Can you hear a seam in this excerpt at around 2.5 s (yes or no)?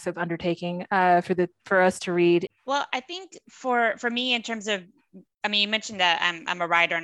yes